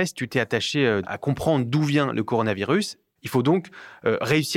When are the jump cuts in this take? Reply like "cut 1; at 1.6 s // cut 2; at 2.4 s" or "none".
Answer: cut 1; at 1.0 s // cut 2; at 3.2 s